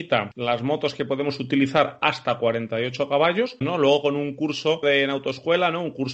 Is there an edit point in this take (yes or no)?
yes